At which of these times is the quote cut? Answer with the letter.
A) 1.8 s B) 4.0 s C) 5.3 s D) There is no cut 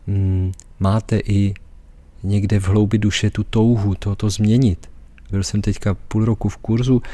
C